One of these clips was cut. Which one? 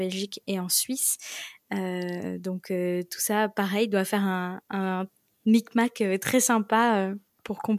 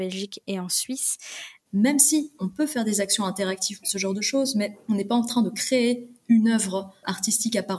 second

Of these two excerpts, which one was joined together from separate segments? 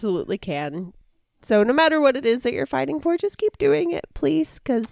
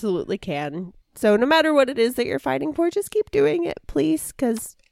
second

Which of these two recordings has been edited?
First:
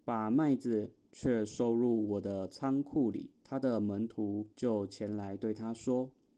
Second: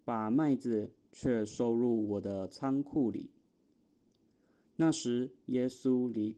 first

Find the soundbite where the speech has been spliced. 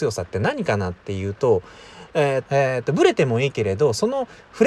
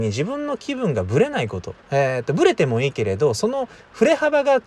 first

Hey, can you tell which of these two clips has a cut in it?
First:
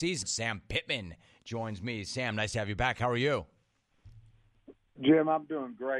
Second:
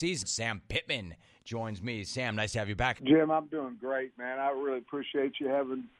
second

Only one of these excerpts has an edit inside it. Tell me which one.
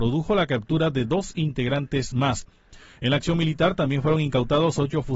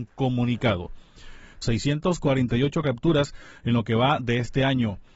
second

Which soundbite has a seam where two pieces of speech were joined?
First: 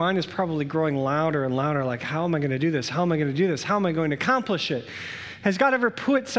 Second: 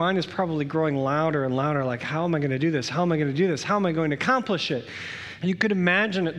second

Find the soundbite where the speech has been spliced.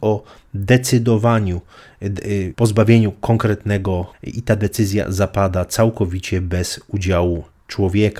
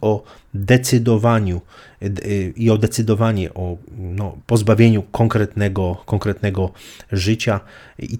first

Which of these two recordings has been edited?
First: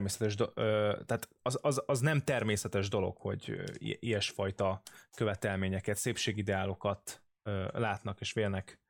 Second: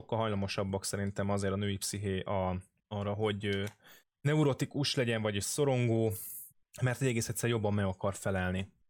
first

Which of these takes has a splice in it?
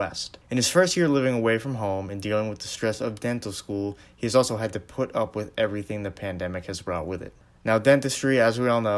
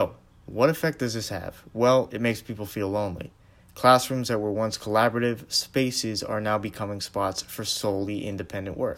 second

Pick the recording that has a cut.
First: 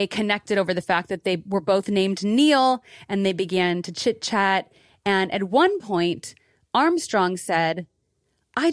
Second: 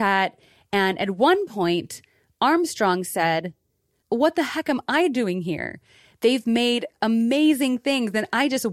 second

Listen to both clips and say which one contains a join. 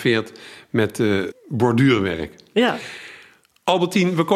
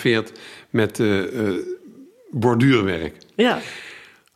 first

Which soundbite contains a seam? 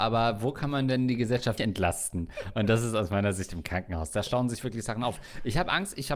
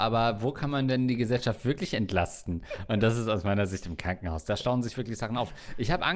first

